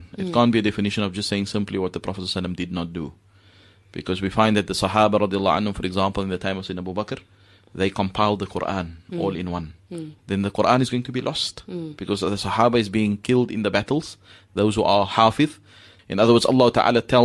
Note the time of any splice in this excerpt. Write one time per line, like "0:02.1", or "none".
0:10.2
0:16.0